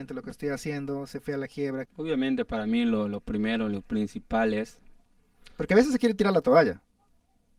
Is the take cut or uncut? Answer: cut